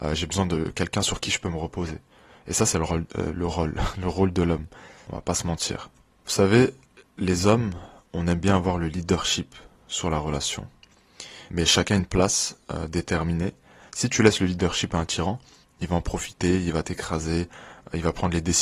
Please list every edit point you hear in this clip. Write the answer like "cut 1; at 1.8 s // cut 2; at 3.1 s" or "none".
cut 1; at 5.0 s // cut 2; at 11.5 s // cut 3; at 13.9 s